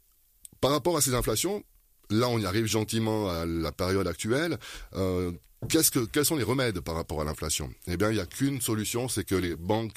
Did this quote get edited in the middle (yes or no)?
no